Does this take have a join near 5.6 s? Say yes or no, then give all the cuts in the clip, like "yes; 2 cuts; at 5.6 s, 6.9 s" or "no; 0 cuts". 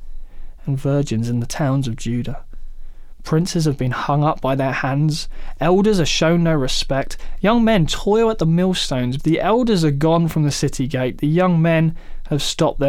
no; 1 cut; at 9.2 s